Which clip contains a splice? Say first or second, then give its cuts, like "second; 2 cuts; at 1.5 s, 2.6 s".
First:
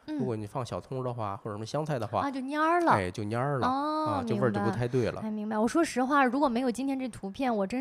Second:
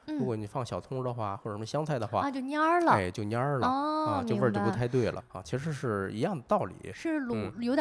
second; 1 cut; at 5.2 s